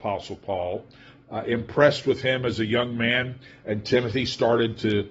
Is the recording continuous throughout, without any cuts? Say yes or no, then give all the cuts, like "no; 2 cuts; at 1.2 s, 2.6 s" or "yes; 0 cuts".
no; 1 cut; at 1.2 s